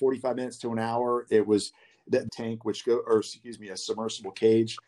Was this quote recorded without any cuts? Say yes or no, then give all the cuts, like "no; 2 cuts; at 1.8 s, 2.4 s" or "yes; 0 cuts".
no; 2 cuts; at 1.3 s, 2.3 s